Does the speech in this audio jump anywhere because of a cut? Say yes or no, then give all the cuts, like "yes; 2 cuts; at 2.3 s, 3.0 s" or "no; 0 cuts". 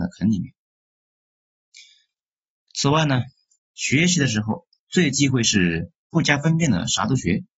yes; 1 cut; at 3.6 s